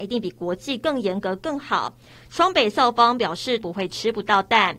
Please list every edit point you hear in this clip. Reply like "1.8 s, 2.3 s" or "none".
2.3 s, 3.6 s